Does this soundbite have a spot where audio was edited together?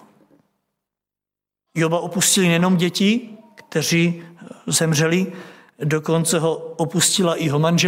yes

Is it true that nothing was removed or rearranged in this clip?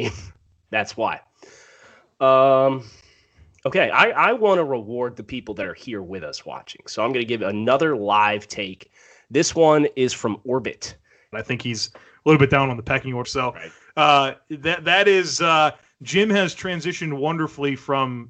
no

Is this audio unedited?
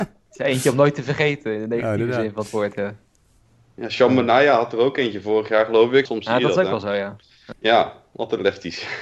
no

